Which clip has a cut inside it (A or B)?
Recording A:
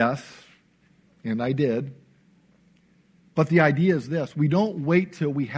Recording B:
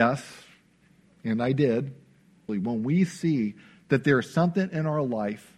B